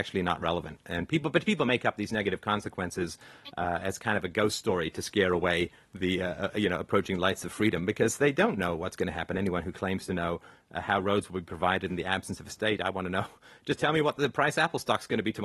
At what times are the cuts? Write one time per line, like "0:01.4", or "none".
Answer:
none